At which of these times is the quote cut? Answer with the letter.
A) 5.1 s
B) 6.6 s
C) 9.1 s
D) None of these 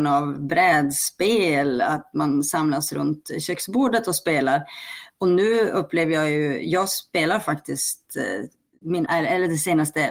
C